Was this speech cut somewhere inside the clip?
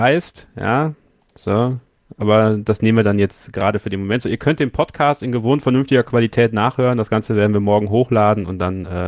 no; 0 cuts

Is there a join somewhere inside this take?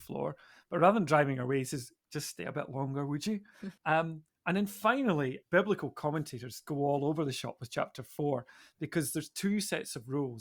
yes; 2 cuts; at 3.8 s, 5.4 s

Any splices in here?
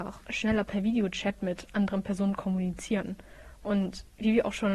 no; 0 cuts

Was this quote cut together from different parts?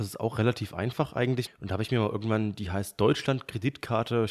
yes; 1 cut; at 1.5 s

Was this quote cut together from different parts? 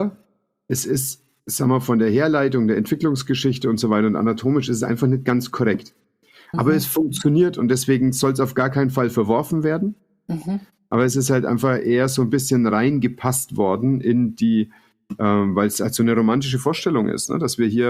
no; 0 cuts

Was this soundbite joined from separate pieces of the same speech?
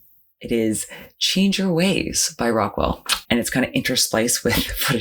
yes; 1 cut; at 3.2 s

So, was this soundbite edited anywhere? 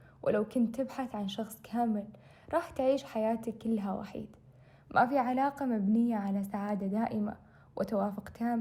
no; 0 cuts

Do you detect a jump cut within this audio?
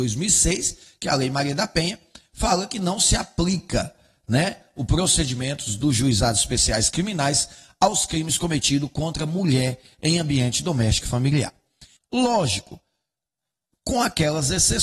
yes; 1 cut; at 12.0 s

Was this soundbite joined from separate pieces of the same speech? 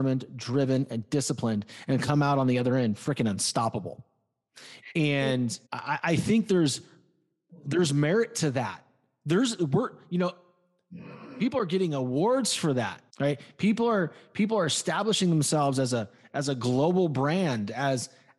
yes; 2 cuts; at 5.7 s, 13.1 s

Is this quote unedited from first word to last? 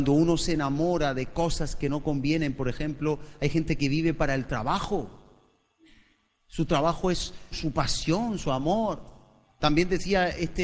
no; 1 cut; at 7.5 s

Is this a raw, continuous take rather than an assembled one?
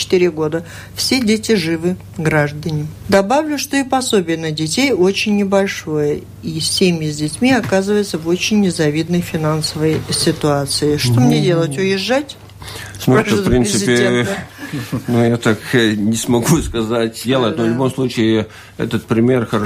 no; 2 cuts; at 3.0 s, 17.2 s

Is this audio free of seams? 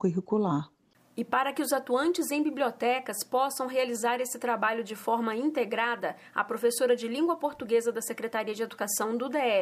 yes; 0 cuts

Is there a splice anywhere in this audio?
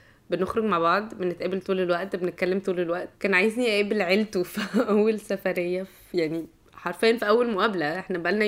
yes; 1 cut; at 3.1 s

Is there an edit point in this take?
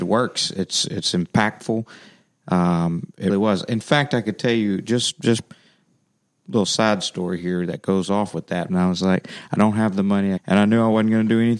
yes; 3 cuts; at 3.3 s, 8.7 s, 10.4 s

